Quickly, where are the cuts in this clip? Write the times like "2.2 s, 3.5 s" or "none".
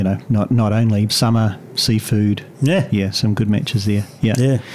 1.1 s